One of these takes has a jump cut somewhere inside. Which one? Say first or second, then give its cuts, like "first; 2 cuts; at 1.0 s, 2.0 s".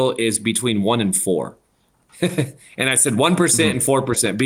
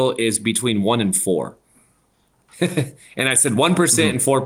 first; 1 cut; at 1.7 s